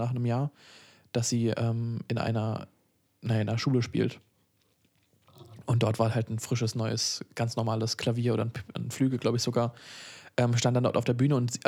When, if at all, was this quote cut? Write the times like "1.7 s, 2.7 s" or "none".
none

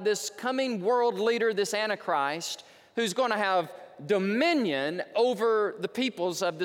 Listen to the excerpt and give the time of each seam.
none

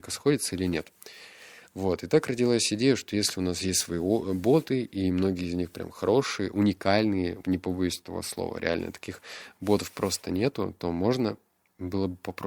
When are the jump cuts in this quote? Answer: 7.4 s

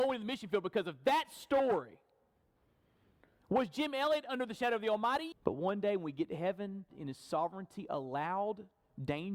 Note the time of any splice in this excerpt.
5.3 s, 6.9 s

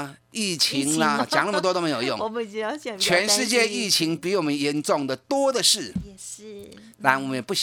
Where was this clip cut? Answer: 1.2 s

